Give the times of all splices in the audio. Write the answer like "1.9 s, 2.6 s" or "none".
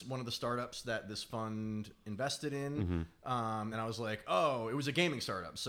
none